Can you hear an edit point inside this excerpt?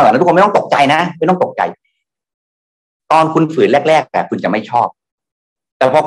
no; 0 cuts

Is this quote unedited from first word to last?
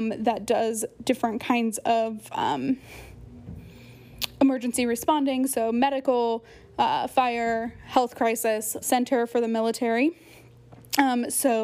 no; 1 cut; at 8.8 s

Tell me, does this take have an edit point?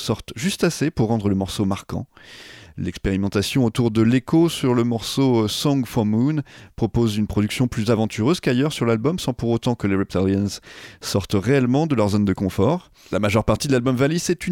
no; 0 cuts

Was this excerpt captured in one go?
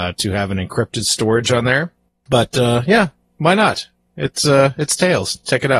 yes; 0 cuts

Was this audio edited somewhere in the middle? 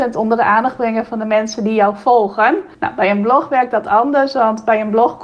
yes; 1 cut; at 2.7 s

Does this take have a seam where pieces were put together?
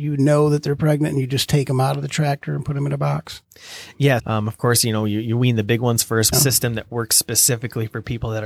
yes; 2 cuts; at 4.2 s, 6.3 s

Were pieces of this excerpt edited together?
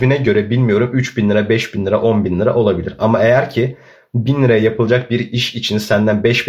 no; 0 cuts

